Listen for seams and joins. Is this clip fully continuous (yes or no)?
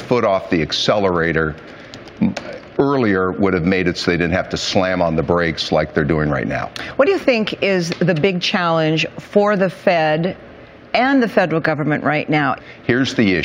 yes